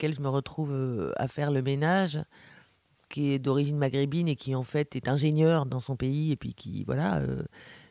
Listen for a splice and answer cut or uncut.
uncut